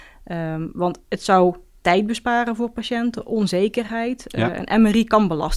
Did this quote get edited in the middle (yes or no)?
no